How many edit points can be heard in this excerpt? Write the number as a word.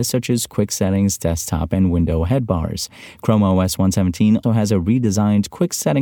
one